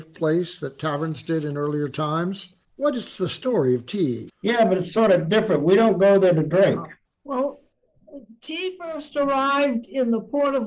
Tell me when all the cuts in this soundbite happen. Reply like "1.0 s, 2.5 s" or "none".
2.6 s, 4.3 s, 7.1 s